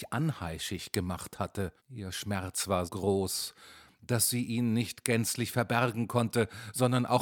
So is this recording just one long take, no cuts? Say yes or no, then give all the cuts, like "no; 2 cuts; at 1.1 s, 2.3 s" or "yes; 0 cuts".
no; 2 cuts; at 1.8 s, 2.9 s